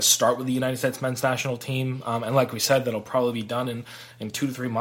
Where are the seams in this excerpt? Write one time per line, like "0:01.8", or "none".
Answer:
none

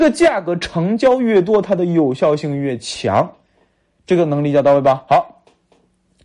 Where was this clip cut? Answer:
none

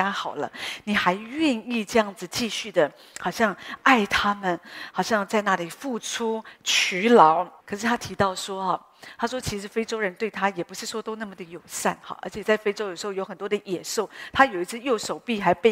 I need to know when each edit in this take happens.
0:04.9
0:07.6

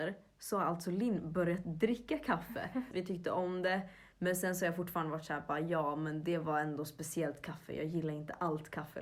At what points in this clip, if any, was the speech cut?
0:02.9
0:04.1

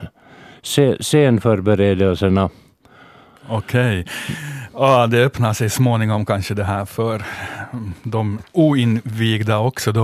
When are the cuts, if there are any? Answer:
0:03.4

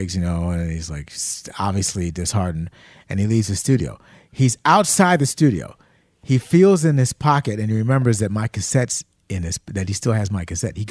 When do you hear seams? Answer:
none

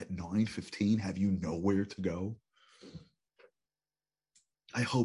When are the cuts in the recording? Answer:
none

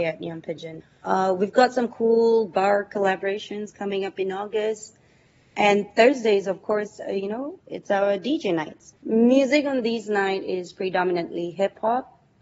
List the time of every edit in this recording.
0:08.9

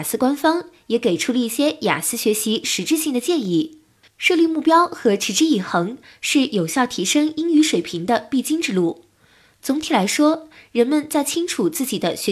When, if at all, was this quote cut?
0:04.0

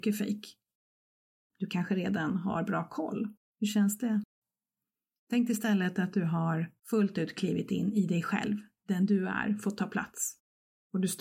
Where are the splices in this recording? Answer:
0:01.5
0:03.5
0:06.8

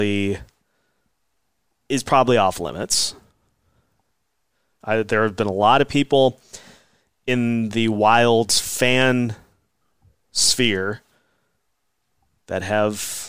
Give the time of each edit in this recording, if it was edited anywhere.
0:04.8

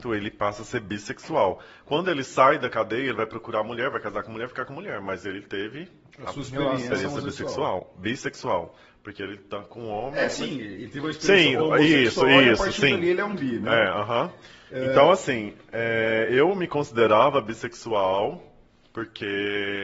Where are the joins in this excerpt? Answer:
none

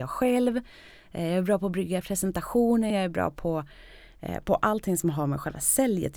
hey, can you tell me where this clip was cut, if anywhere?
0:02.9

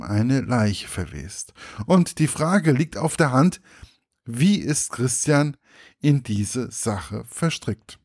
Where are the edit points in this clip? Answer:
0:01.9

